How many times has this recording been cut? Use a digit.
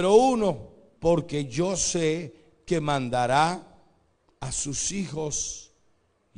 1